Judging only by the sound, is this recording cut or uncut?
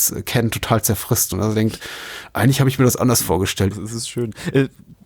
cut